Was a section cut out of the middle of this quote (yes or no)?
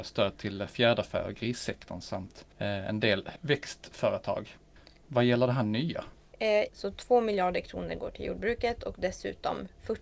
yes